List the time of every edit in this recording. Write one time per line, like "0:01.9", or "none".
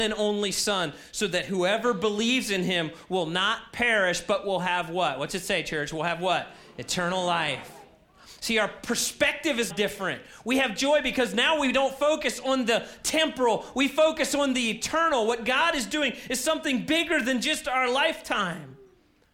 0:09.7